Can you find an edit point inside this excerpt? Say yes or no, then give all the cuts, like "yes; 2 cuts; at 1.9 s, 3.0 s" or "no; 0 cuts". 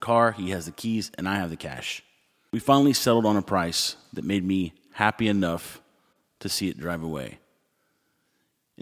no; 0 cuts